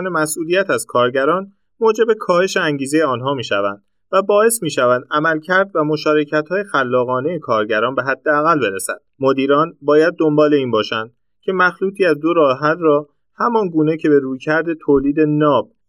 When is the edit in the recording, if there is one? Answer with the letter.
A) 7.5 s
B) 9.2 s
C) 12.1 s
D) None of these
B